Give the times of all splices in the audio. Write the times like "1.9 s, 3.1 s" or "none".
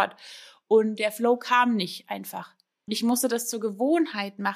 2.9 s